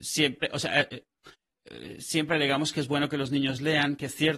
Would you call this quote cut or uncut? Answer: uncut